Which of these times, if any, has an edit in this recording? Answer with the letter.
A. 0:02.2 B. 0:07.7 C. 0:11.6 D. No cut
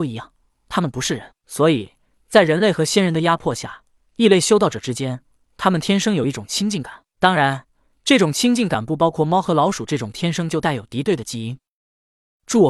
D